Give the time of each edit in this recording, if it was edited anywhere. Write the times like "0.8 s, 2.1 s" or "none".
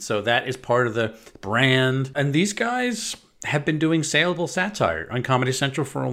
2.1 s